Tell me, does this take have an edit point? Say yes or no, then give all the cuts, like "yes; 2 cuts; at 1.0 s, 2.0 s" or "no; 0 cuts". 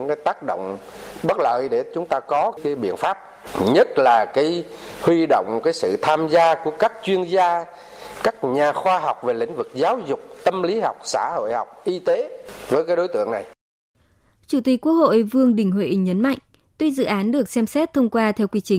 no; 0 cuts